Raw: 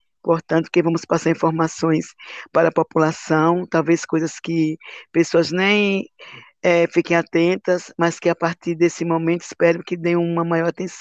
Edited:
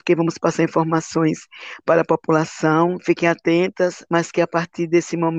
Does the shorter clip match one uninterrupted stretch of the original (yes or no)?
no